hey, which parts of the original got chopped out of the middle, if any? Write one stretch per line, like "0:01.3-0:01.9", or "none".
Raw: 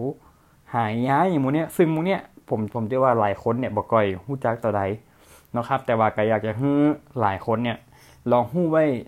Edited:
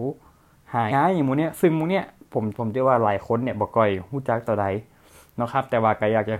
0:00.9-0:01.1